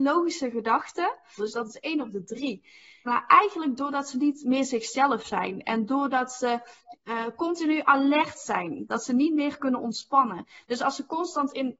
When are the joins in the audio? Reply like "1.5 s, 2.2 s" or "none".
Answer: 1.4 s, 3.1 s, 8.9 s